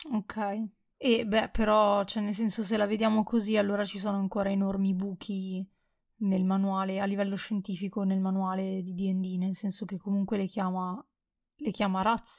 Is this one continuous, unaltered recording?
yes; 0 cuts

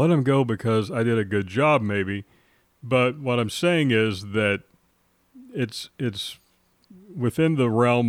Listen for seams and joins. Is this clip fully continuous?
yes; 0 cuts

